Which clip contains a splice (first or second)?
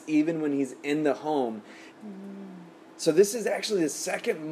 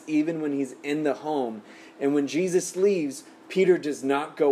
first